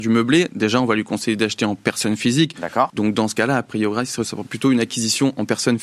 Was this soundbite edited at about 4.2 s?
no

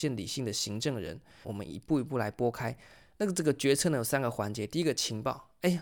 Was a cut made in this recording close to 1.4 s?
yes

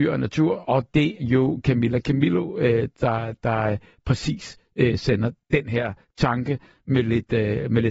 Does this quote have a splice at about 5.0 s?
no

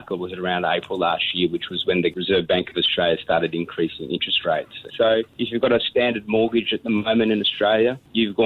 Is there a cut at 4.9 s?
yes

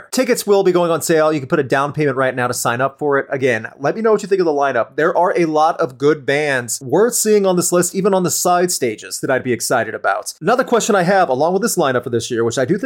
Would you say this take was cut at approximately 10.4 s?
yes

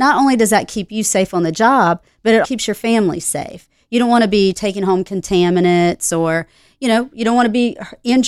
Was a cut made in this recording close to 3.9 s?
no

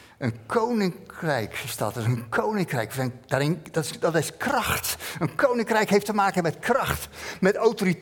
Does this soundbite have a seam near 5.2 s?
no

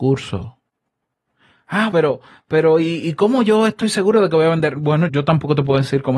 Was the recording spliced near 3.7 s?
no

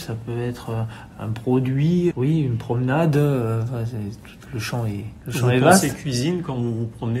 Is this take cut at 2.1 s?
yes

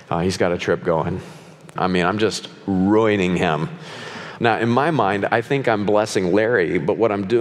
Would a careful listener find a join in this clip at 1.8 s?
yes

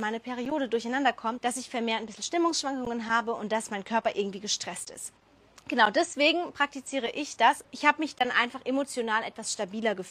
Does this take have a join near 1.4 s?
yes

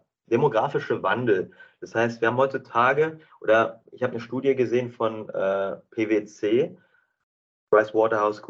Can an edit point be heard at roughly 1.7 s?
no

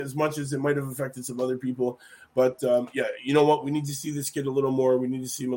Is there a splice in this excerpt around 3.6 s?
no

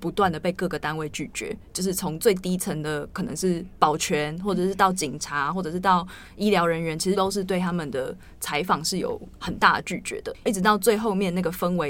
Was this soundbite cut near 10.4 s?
no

